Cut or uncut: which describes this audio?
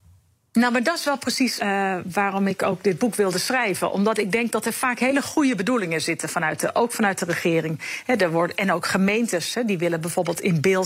cut